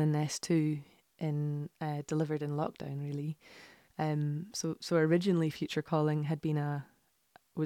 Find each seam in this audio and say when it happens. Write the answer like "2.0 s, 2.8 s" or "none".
3.9 s

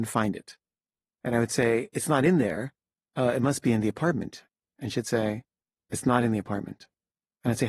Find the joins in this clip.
1.9 s

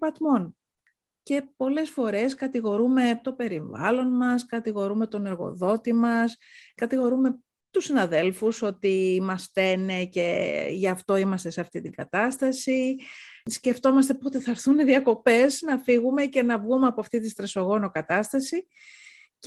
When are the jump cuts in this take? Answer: none

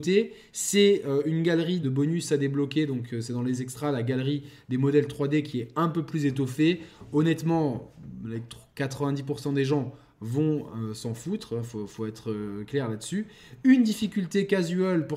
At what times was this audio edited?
1.8 s

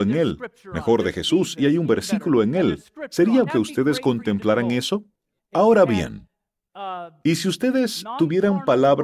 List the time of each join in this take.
3.5 s, 5.4 s

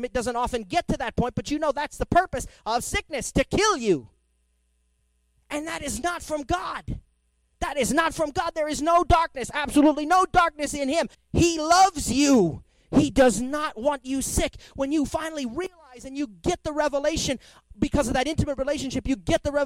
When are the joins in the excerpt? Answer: 11.1 s

